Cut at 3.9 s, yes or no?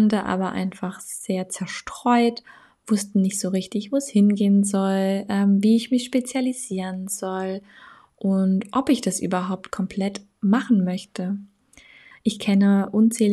no